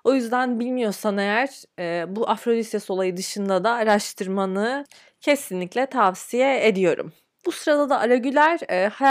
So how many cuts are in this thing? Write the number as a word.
one